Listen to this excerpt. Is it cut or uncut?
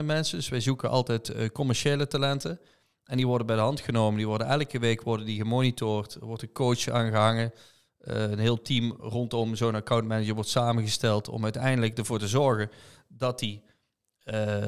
uncut